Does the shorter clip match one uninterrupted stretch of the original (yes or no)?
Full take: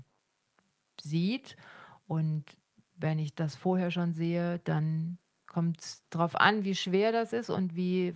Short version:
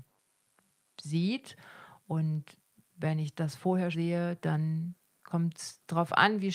no